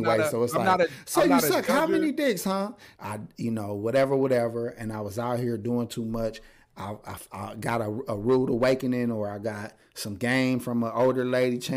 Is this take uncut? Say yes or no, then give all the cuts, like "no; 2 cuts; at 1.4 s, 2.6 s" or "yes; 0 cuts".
no; 1 cut; at 3.0 s